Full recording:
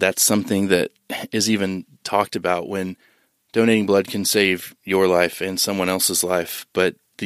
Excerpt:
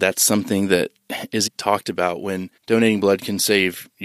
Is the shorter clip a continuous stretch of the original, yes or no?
no